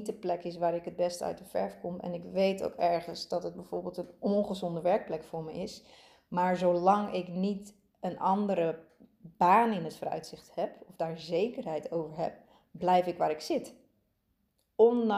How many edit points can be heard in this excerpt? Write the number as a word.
zero